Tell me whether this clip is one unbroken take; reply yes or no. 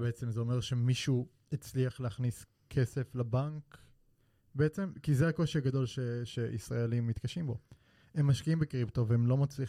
yes